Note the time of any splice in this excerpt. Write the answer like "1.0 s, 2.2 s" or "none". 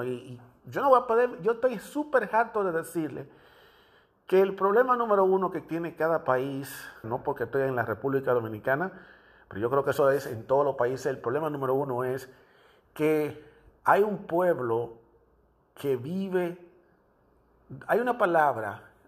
7.0 s